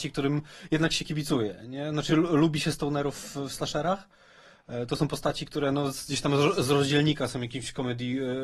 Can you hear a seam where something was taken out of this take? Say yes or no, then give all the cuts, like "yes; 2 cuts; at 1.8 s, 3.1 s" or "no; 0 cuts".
no; 0 cuts